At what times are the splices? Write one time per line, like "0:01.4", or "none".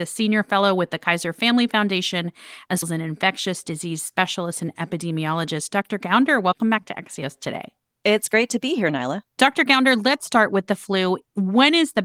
0:02.8
0:09.3